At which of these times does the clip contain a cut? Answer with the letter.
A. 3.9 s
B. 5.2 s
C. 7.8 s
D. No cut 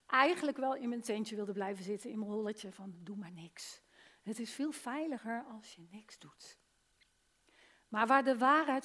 D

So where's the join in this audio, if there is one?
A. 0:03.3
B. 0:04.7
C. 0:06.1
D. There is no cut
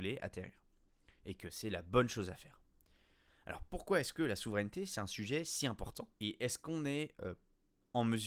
C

